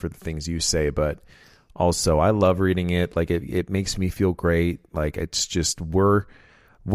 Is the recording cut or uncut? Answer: uncut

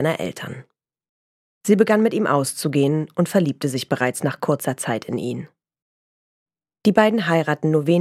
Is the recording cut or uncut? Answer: cut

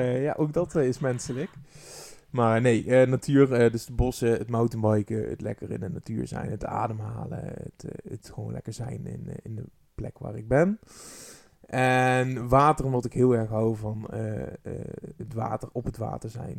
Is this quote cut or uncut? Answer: uncut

